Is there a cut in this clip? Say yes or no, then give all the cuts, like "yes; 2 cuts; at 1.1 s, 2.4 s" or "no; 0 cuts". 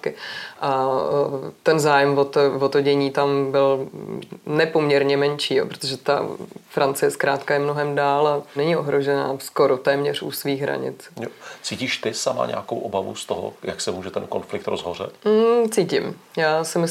yes; 2 cuts; at 8.6 s, 15.2 s